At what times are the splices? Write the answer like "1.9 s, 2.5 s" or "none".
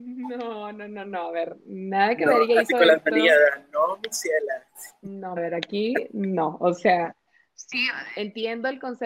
5.4 s